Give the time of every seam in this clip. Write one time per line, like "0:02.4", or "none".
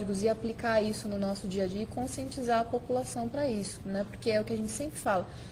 none